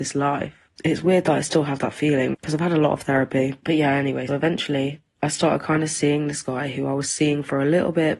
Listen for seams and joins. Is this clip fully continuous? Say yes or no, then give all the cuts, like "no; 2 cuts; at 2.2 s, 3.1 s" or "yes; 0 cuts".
no; 2 cuts; at 2.3 s, 4.3 s